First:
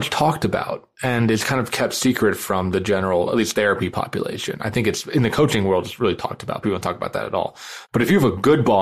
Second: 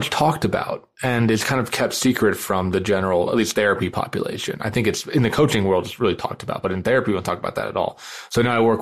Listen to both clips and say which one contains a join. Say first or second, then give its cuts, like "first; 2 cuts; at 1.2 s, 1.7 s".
first; 2 cuts; at 6.6 s, 7.9 s